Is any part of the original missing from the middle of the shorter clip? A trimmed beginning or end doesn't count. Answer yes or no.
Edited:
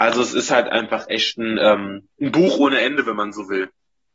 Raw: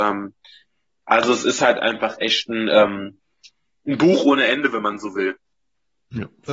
yes